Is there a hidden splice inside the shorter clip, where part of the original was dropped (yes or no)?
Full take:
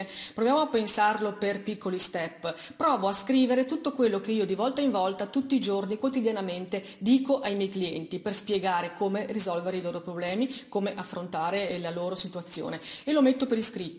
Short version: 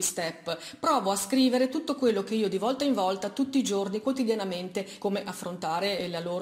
yes